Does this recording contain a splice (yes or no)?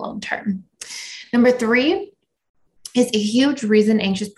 no